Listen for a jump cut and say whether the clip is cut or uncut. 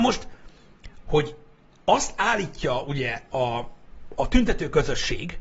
cut